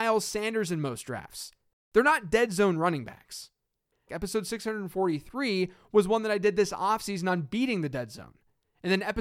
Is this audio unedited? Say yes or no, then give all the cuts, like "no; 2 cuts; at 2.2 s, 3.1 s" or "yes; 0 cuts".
no; 1 cut; at 4.1 s